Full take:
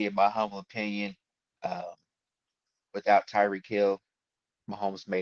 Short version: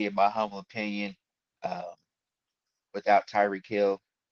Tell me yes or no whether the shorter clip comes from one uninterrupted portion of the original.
yes